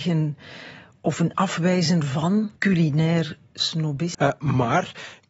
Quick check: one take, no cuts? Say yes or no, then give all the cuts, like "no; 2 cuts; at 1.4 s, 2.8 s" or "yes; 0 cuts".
no; 2 cuts; at 2.6 s, 4.1 s